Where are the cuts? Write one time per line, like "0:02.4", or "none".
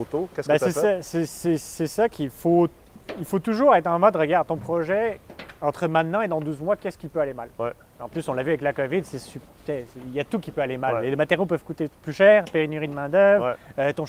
none